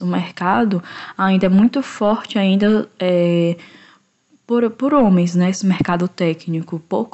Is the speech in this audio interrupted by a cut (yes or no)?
no